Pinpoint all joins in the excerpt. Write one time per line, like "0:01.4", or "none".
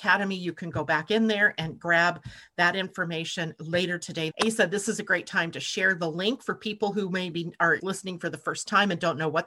0:04.3
0:07.8